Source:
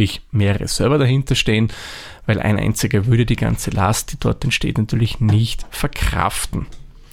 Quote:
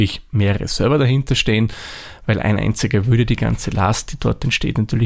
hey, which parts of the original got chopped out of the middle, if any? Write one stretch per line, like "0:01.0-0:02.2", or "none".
none